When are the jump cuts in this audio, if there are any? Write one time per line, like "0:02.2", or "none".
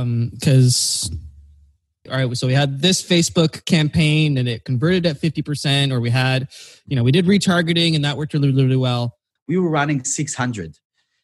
0:02.1
0:09.4